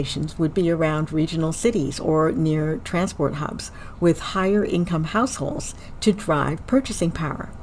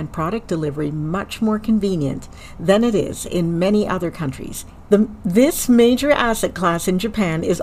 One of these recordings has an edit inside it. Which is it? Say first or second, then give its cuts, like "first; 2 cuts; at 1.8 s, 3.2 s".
second; 1 cut; at 4.8 s